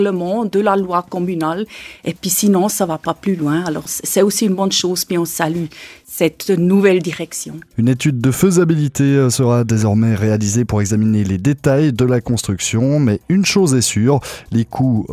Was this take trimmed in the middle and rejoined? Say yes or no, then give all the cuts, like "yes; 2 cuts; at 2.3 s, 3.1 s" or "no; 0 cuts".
yes; 1 cut; at 3.9 s